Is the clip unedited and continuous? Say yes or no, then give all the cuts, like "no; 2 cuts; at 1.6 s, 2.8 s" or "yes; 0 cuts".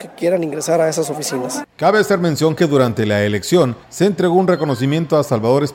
no; 1 cut; at 3.8 s